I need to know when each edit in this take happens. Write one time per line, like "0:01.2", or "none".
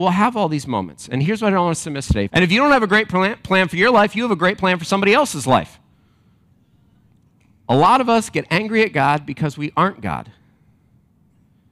0:02.3